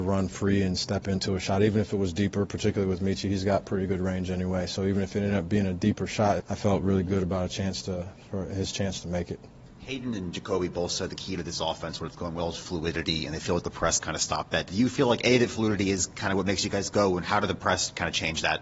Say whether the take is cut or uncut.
cut